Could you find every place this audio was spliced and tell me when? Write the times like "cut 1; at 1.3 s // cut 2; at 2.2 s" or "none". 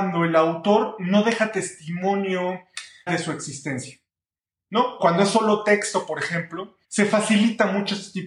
cut 1; at 3.1 s // cut 2; at 5.0 s // cut 3; at 6.8 s